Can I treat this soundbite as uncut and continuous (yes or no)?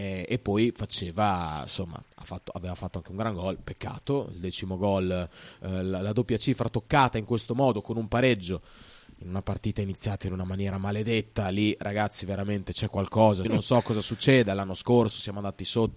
no